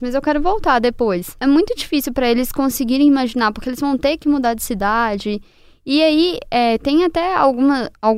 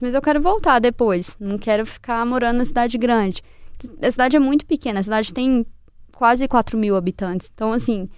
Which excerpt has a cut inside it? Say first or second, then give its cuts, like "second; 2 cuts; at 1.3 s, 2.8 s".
first; 1 cut; at 1.4 s